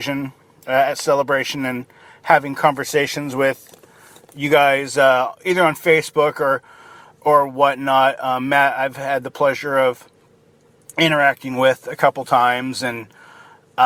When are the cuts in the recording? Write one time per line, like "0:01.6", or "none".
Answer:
none

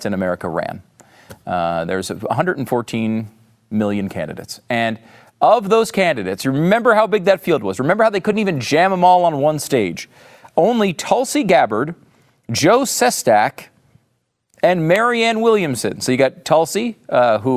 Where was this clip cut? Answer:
none

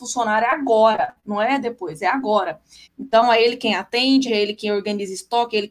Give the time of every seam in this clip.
0:02.8
0:04.3

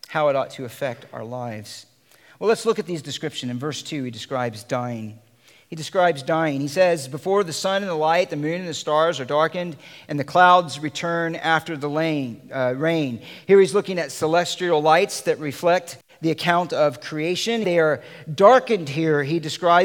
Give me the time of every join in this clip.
0:17.6

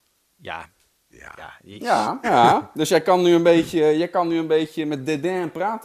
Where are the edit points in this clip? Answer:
0:02.2

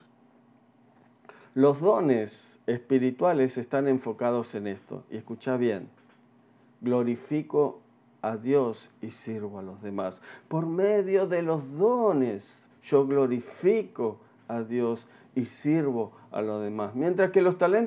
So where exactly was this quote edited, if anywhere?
0:12.7

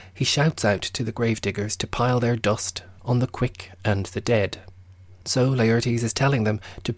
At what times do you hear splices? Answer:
0:03.0
0:05.2

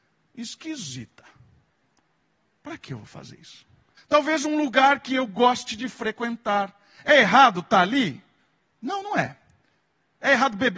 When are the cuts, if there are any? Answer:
0:04.0

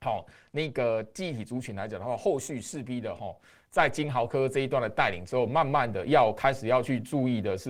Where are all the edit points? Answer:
none

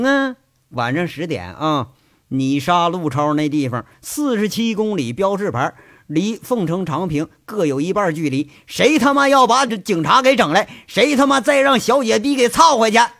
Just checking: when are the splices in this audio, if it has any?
0:09.7

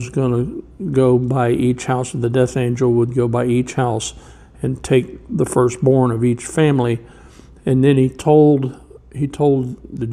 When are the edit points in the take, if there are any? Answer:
none

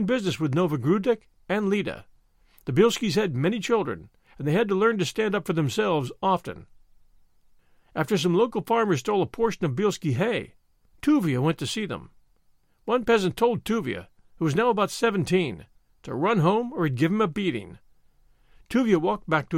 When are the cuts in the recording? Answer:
none

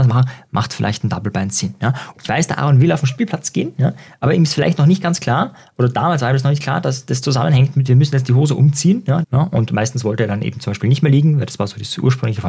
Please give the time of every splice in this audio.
0:02.1
0:09.2

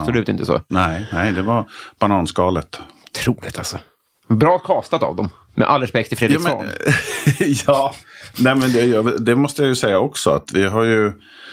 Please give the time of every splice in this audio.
none

